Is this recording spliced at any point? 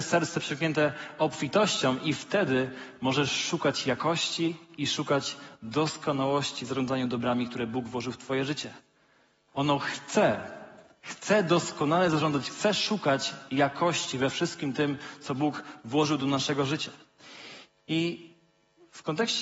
yes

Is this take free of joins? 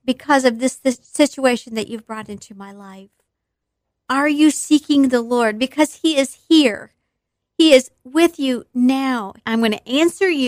no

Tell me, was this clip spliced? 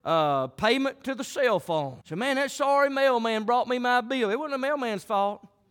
yes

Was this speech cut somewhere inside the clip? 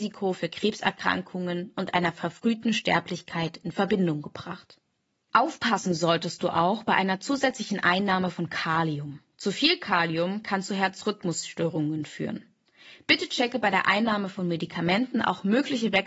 no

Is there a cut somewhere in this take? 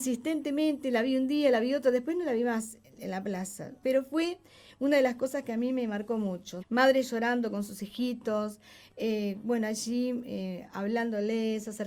yes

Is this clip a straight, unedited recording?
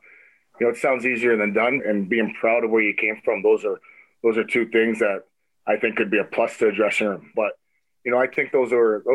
no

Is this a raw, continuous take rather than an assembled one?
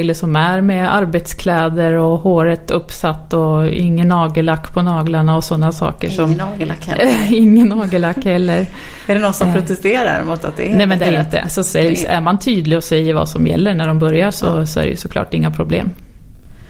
no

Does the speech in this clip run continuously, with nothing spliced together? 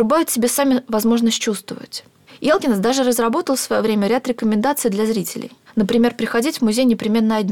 yes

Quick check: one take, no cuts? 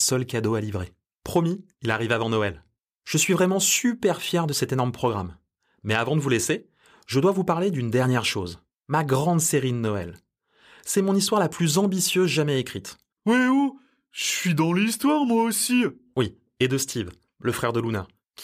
no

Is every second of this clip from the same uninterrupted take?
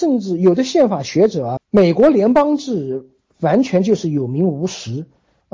no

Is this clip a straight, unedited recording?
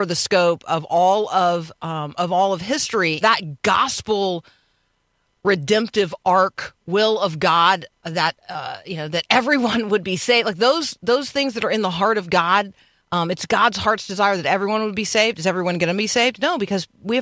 no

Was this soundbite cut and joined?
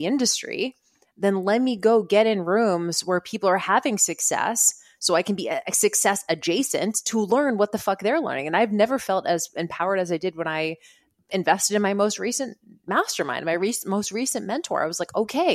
no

